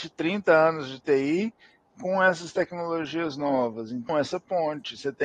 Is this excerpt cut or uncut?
cut